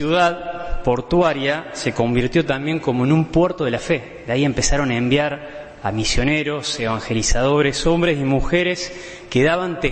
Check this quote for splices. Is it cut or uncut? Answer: uncut